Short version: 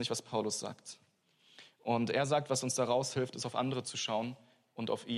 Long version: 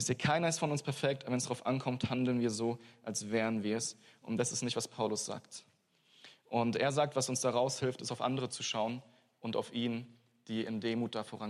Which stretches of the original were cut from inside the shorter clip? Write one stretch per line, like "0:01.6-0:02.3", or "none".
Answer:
none